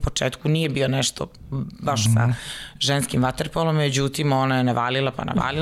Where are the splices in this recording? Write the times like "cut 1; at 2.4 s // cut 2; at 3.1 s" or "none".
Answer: cut 1; at 2.1 s